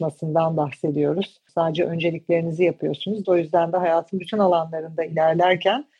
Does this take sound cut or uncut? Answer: cut